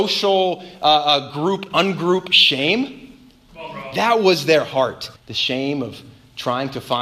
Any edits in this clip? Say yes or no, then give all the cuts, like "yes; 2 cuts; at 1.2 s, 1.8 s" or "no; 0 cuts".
yes; 2 cuts; at 3.5 s, 5.2 s